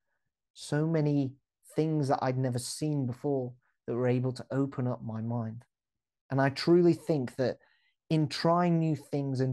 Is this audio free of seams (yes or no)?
yes